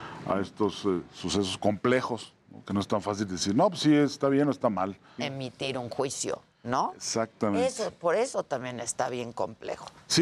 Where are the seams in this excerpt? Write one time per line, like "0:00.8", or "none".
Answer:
0:05.2